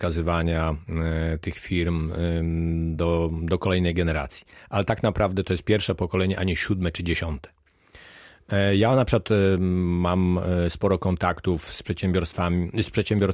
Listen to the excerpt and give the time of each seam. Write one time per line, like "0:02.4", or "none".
none